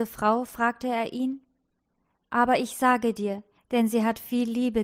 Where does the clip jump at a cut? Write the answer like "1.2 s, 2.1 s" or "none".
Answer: 2.1 s, 3.6 s